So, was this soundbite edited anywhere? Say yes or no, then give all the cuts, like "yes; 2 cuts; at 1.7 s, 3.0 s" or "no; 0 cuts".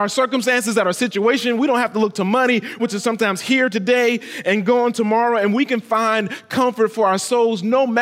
yes; 1 cut; at 2.8 s